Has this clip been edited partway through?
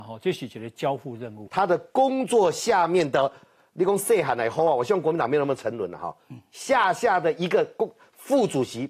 yes; 1 cut; at 1.5 s

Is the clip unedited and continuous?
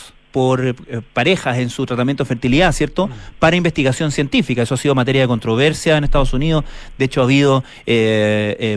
yes; 0 cuts

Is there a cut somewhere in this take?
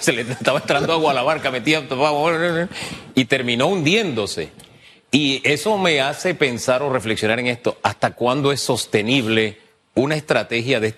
no; 0 cuts

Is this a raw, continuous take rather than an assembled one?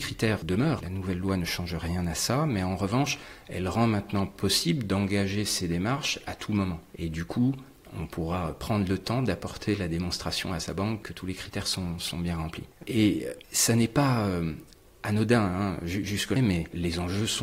no; 2 cuts; at 13.4 s, 16.4 s

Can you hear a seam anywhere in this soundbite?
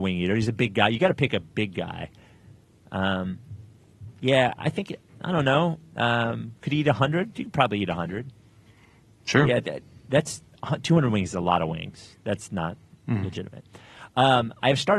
no; 0 cuts

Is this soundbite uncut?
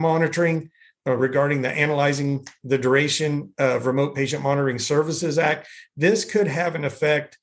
no; 1 cut; at 1.0 s

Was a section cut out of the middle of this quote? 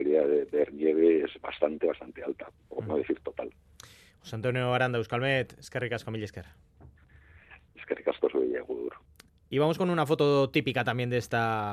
no; 0 cuts

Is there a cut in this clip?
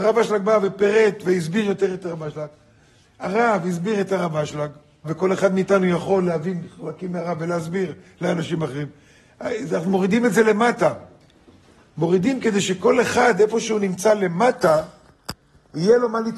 yes; 1 cut; at 5.0 s

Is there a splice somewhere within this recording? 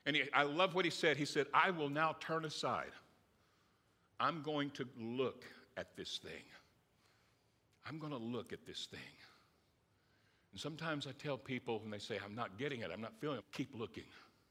yes; 1 cut; at 13.4 s

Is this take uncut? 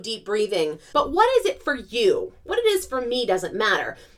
no; 1 cut; at 0.9 s

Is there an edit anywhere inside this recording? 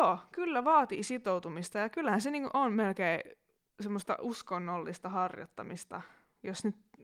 no; 0 cuts

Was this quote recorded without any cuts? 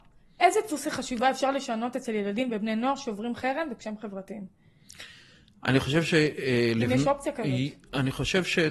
yes; 0 cuts

